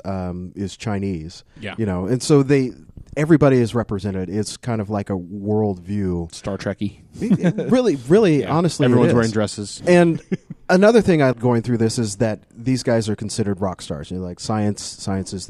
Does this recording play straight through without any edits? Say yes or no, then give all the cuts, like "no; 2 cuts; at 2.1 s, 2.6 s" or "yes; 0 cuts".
no; 2 cuts; at 9.8 s, 11.3 s